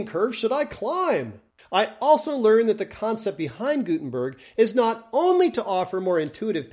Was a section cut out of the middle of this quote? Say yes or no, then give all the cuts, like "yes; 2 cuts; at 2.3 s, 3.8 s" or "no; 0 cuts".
yes; 1 cut; at 1.6 s